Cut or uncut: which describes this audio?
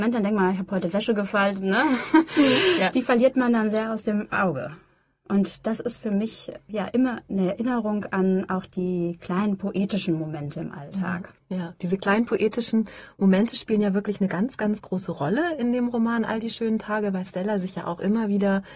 cut